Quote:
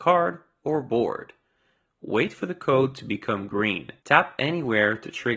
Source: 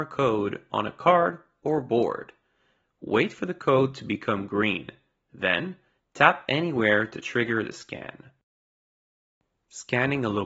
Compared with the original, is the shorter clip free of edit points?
no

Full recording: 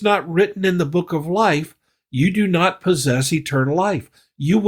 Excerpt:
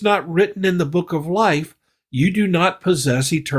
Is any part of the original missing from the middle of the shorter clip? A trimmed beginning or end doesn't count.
no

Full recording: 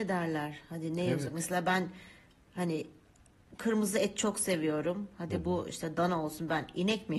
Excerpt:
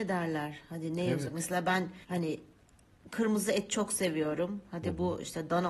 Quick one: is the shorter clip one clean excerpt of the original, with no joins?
no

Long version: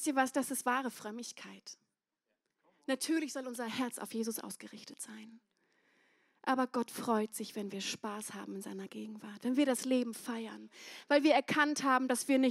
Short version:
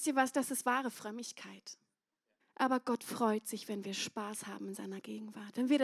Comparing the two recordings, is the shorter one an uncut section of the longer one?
no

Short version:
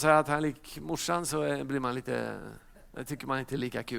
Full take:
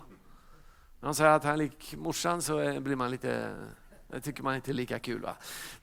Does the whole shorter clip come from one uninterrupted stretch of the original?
yes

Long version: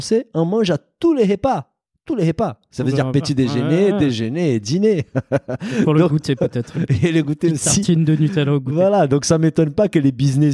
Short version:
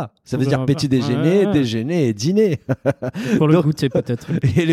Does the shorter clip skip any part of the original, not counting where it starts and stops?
no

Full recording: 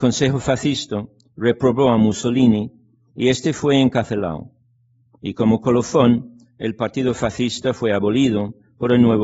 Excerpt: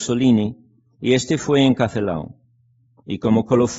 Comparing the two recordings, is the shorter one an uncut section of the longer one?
yes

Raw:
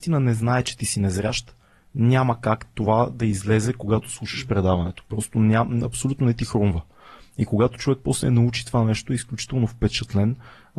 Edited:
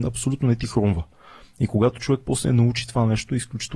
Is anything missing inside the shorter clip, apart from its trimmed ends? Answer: no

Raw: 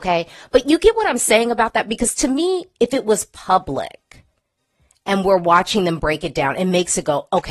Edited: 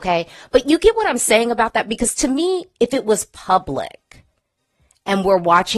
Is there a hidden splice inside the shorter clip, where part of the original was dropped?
no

